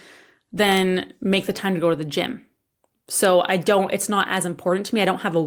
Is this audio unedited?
yes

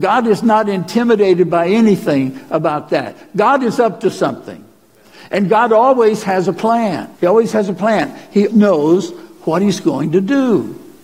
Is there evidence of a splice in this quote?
yes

